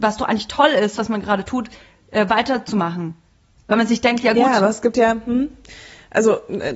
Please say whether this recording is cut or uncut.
uncut